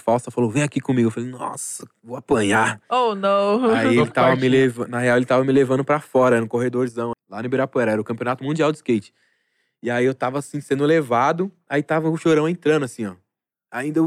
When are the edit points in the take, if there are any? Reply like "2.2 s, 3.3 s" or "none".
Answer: 7.1 s

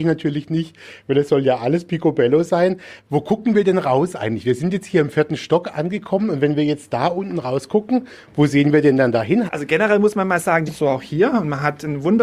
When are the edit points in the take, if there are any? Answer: 9.5 s, 10.7 s

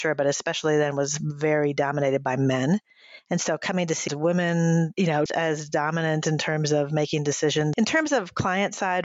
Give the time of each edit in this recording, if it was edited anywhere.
4.1 s, 5.3 s, 7.7 s

